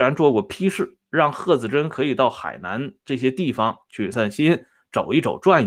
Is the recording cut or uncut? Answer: cut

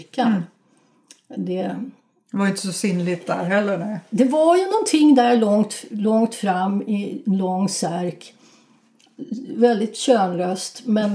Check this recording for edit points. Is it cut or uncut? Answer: uncut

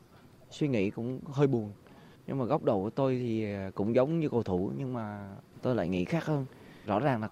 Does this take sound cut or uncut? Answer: uncut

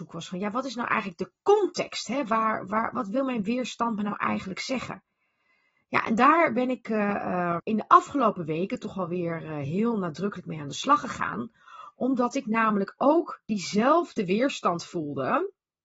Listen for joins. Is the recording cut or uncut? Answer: cut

